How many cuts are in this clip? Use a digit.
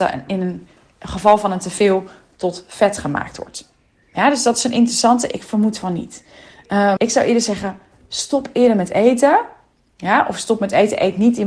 1